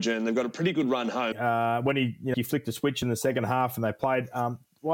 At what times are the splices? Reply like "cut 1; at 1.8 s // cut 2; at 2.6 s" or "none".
cut 1; at 1.3 s // cut 2; at 2.3 s